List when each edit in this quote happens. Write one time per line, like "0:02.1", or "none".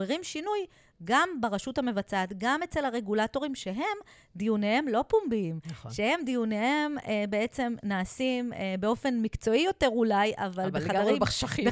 none